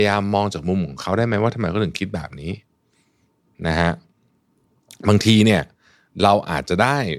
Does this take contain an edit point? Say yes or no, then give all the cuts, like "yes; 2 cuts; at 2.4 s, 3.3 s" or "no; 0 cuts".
no; 0 cuts